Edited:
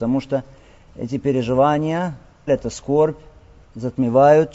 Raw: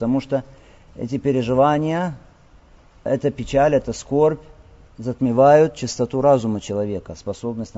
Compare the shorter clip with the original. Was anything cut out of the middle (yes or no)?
yes